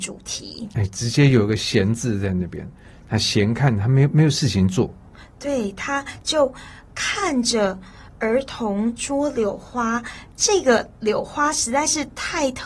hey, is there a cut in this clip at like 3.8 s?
no; 0 cuts

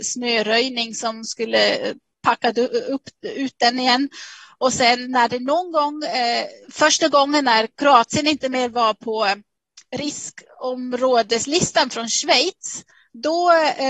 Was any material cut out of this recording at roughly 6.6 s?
yes; 3 cuts; at 5.0 s, 6.6 s, 7.7 s

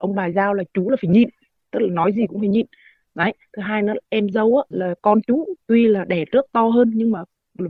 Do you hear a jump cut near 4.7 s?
yes; 1 cut; at 4.7 s

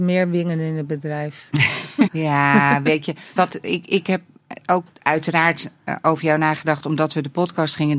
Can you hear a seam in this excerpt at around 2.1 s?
yes; 2 cuts; at 2.1 s, 3.4 s

